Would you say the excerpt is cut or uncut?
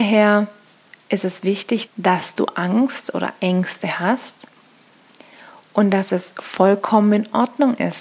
cut